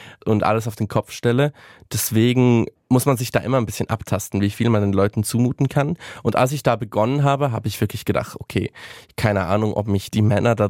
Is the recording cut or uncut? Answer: uncut